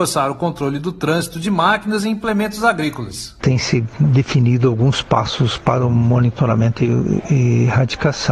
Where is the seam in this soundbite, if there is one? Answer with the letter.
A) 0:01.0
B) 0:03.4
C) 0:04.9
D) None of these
B